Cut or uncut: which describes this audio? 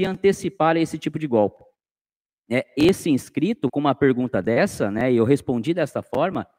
uncut